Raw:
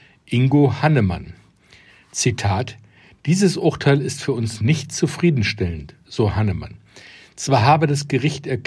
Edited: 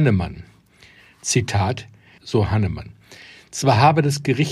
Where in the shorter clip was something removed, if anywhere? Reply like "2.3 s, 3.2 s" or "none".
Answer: 2.2 s